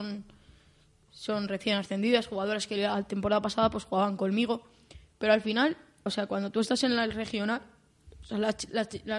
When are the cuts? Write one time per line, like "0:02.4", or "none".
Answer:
0:06.1